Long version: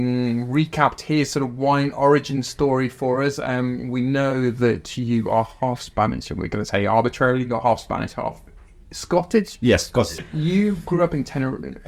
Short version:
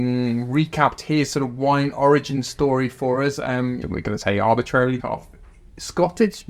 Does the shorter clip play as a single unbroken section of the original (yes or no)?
no